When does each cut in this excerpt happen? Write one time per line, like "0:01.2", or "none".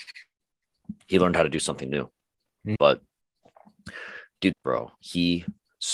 0:02.8
0:04.5